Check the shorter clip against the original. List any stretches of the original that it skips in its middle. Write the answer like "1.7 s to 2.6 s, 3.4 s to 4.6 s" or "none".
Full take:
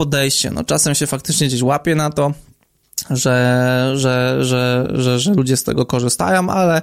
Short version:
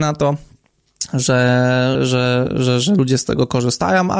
3.9 s to 4.3 s